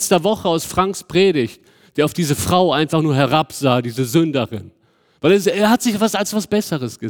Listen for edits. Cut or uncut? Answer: uncut